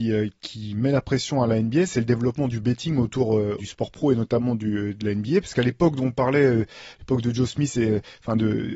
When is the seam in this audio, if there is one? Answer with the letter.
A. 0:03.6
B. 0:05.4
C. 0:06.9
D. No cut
A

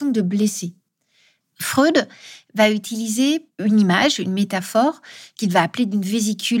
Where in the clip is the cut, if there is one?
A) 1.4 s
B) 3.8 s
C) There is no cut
A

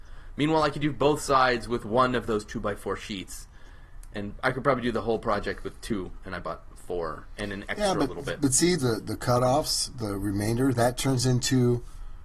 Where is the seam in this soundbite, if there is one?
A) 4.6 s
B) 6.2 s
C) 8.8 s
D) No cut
C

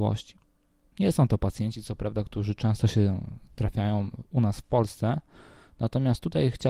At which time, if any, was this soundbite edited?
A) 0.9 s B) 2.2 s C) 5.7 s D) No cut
A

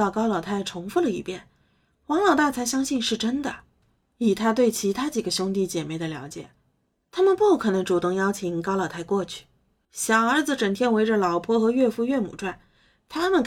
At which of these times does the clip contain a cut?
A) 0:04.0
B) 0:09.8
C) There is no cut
B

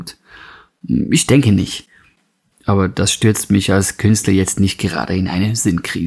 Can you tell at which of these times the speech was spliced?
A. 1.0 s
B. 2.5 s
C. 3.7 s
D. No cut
B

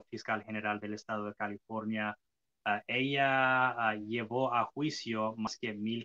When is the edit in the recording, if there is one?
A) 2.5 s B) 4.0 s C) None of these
C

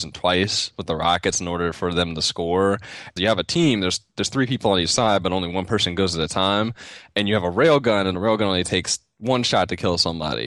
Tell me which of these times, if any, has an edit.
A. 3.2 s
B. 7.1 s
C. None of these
A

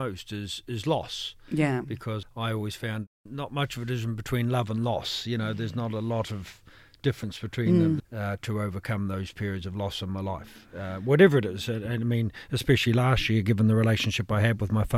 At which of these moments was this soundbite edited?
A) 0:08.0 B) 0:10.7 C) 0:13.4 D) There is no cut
A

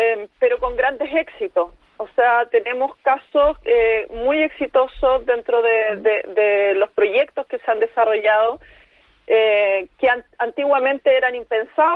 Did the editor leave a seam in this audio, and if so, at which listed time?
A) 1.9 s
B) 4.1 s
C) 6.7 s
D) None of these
D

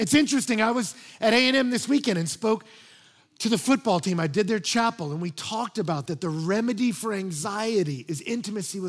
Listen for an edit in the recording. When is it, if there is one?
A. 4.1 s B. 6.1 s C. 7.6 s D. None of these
B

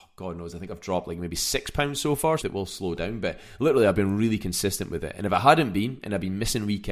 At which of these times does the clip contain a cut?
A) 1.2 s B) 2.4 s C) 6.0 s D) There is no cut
B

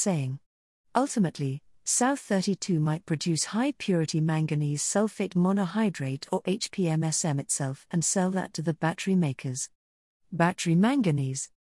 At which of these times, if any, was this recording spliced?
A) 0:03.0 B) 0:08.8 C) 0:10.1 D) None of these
C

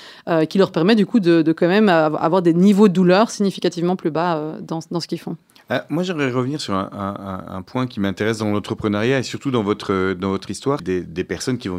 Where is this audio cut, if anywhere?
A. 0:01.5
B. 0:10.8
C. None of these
B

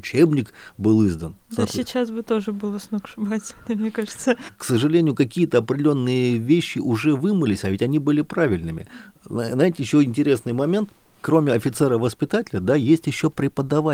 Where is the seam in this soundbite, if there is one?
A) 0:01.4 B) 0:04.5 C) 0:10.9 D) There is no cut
B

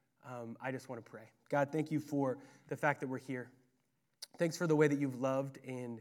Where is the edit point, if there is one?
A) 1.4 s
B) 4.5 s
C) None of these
A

